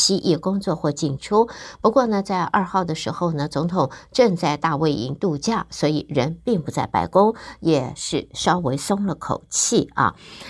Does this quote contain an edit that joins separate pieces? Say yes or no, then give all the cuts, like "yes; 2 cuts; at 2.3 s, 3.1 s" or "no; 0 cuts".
no; 0 cuts